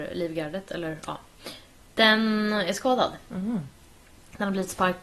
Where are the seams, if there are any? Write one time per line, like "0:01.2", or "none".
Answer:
none